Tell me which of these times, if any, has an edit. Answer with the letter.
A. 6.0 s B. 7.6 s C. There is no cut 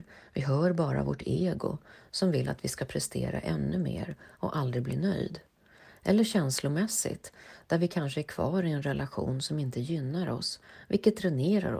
C